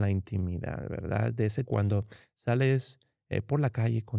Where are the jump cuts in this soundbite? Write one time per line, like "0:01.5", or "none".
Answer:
0:01.7

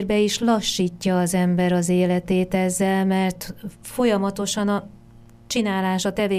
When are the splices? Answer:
none

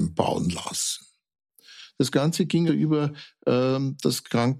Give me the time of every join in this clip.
0:02.7

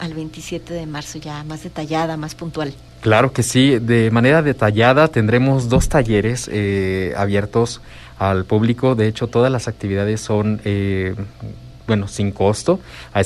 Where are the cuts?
0:11.8

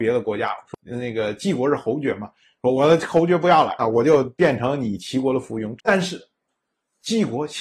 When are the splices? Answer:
0:03.8
0:05.8

